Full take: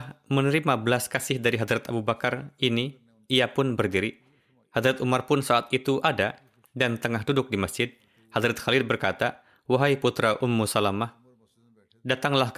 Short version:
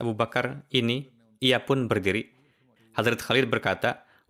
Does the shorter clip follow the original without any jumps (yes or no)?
no